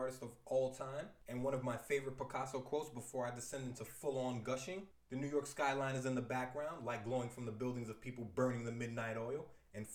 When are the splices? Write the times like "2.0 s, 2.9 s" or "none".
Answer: 4.9 s